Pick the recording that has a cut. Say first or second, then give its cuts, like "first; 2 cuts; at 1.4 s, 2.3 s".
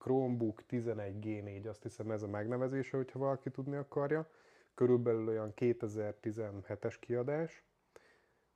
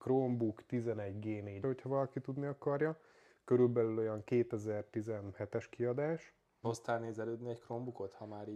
second; 2 cuts; at 1.6 s, 6.6 s